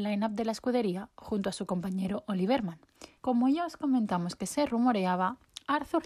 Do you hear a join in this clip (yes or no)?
yes